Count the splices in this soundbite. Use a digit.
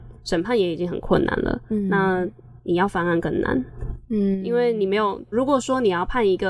1